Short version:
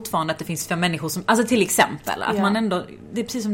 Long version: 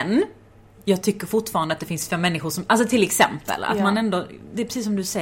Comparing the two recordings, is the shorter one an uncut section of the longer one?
yes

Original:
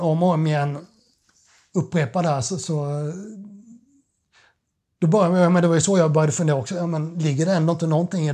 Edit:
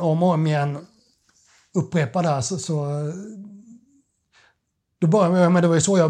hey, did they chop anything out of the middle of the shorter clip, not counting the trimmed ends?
no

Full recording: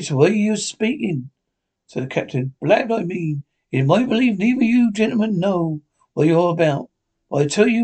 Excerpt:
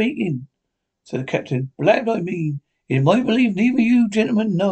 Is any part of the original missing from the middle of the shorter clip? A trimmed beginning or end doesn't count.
no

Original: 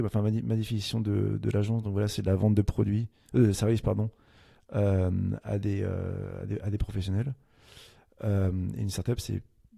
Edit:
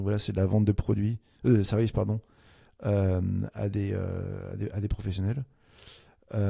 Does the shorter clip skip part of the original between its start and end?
no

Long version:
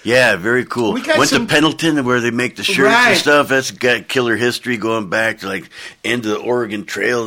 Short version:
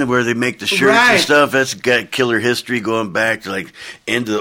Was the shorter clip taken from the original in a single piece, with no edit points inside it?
yes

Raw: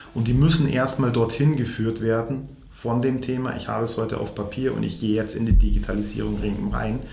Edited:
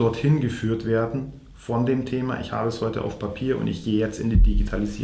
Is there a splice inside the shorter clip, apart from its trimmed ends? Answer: no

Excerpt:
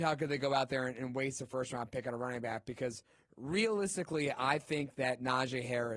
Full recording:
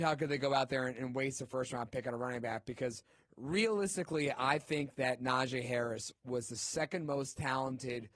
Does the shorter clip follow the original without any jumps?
yes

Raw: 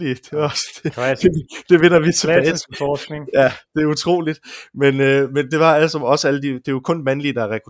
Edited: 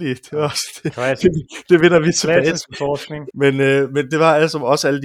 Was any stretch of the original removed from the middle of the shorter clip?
yes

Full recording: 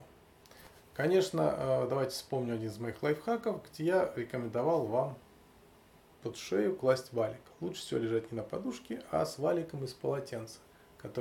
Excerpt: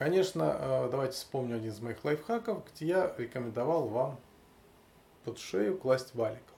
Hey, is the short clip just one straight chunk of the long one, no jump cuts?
yes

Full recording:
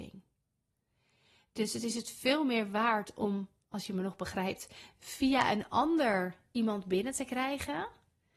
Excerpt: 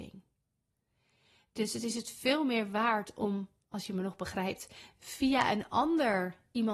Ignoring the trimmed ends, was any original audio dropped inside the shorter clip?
no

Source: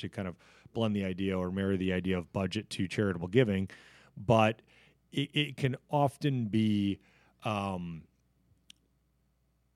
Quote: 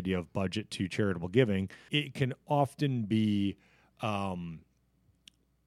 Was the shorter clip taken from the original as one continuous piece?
no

